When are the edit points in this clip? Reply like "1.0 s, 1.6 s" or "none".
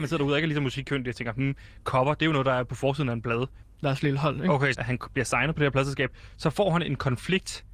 3.6 s, 4.7 s